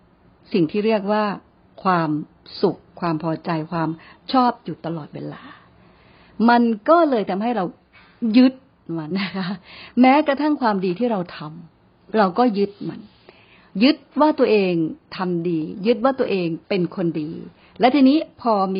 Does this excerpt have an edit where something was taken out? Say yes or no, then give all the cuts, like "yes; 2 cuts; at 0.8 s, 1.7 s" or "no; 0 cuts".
yes; 2 cuts; at 9.1 s, 16.6 s